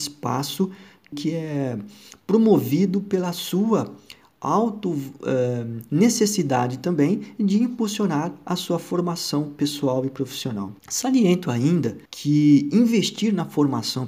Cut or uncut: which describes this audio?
cut